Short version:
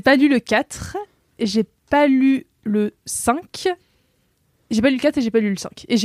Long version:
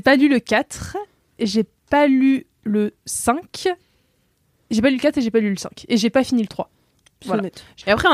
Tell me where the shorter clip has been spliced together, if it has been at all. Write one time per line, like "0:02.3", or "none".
none